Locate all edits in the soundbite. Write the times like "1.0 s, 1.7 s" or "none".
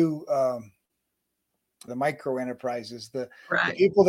1.9 s